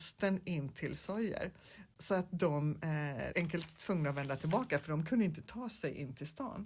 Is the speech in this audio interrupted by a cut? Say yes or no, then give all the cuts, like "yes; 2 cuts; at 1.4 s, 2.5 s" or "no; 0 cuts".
yes; 1 cut; at 3.3 s